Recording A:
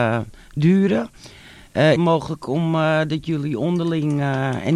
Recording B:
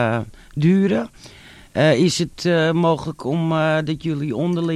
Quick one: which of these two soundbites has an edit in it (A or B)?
A